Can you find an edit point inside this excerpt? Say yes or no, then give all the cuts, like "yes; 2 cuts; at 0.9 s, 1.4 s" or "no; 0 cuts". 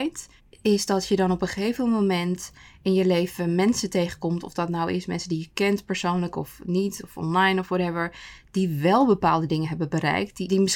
no; 0 cuts